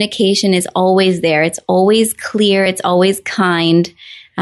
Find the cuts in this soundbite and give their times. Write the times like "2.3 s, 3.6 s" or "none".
none